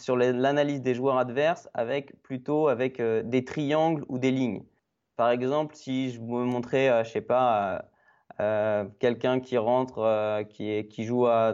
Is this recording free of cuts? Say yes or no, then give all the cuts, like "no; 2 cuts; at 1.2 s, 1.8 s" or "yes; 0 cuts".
yes; 0 cuts